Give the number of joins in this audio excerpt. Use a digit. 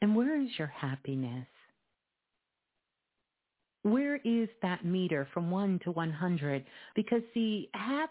1